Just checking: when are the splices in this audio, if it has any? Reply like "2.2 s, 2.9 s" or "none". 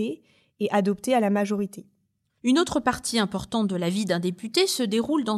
none